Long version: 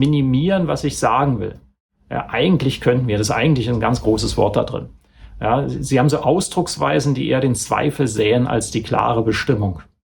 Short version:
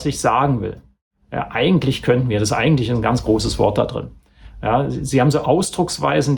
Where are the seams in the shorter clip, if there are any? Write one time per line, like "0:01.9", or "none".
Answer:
none